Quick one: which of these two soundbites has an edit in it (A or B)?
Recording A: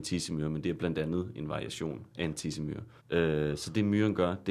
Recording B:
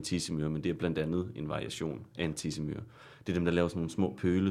A